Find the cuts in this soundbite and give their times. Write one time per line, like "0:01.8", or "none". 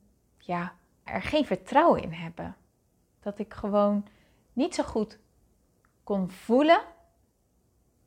0:01.1